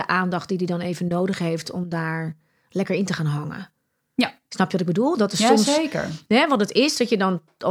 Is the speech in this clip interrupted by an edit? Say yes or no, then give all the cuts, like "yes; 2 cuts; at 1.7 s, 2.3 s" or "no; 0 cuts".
no; 0 cuts